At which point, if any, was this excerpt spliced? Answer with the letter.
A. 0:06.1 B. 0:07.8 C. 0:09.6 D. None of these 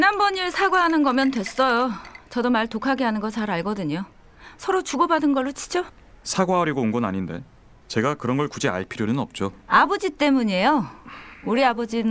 B